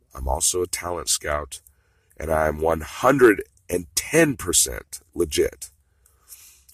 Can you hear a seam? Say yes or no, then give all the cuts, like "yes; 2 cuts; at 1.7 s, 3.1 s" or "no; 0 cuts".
no; 0 cuts